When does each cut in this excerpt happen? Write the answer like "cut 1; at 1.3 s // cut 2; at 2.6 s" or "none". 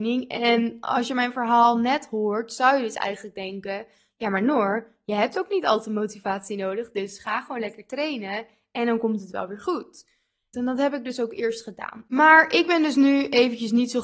cut 1; at 10.5 s // cut 2; at 12.1 s

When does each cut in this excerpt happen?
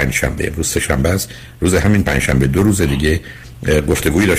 none

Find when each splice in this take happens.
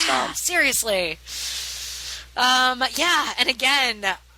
none

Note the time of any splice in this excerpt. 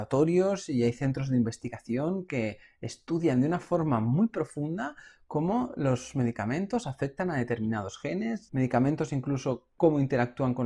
cut 1; at 8.5 s

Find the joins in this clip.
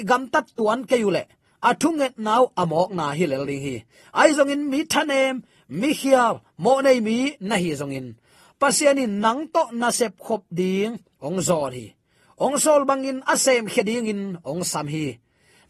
none

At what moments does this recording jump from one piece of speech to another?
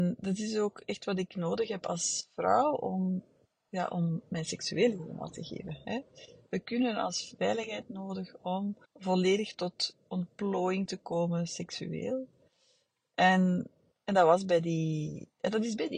cut 1; at 7.4 s // cut 2; at 8.8 s

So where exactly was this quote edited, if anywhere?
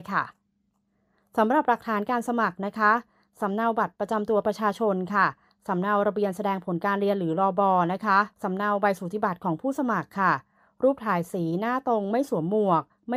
cut 1; at 8.3 s

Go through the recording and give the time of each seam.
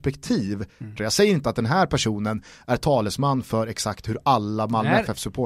cut 1; at 1.0 s

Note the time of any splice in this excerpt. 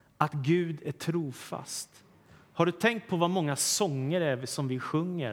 none

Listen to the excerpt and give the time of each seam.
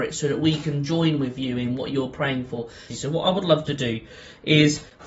cut 1; at 2.9 s

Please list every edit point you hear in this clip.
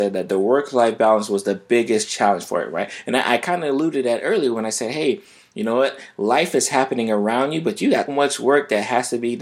cut 1; at 8.1 s

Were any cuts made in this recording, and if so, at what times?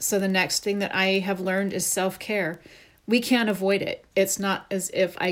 cut 1; at 4.1 s

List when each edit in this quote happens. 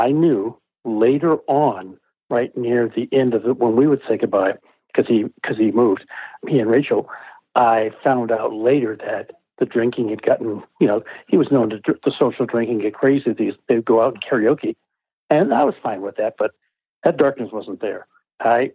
cut 1; at 6.4 s // cut 2; at 16.3 s

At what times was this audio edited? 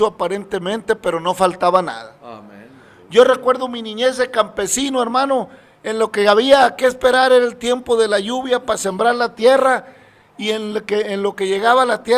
none

